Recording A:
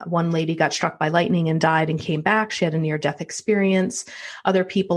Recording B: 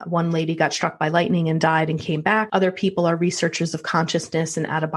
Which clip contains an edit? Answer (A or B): B